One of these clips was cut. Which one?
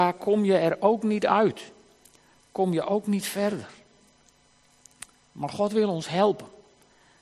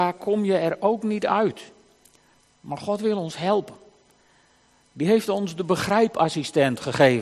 second; 1 cut; at 2.5 s

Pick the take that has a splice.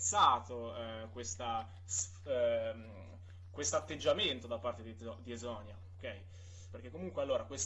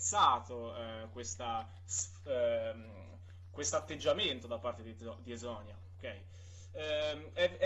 first; 1 cut; at 6.7 s

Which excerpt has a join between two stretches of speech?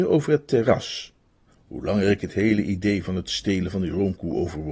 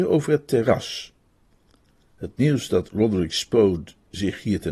first; 1 cut; at 1.5 s

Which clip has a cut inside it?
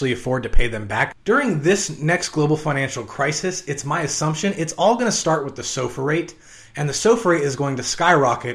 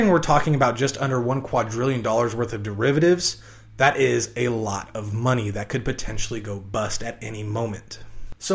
first; 1 cut; at 1.2 s

